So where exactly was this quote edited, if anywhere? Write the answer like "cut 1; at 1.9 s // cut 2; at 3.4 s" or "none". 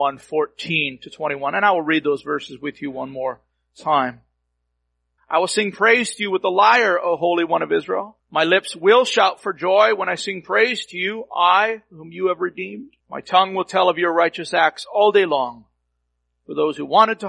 cut 1; at 5.2 s // cut 2; at 8.2 s // cut 3; at 13.0 s